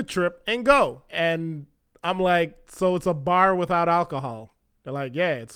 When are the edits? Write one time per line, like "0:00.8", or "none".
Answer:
0:01.1